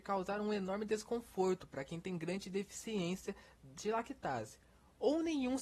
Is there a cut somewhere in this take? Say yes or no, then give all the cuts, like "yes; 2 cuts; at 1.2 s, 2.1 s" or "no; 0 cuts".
no; 0 cuts